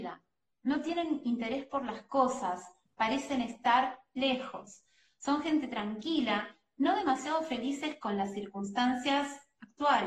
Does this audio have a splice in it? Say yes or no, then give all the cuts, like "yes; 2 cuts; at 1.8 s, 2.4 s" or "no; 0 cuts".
no; 0 cuts